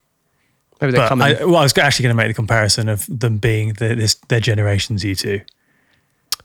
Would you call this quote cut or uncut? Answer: uncut